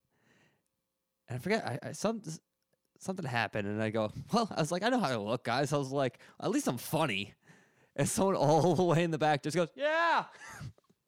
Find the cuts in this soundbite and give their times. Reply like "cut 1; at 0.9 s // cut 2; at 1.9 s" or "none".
none